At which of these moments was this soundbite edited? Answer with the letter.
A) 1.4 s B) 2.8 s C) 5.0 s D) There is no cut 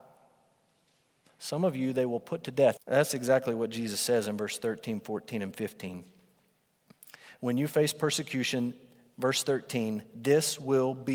B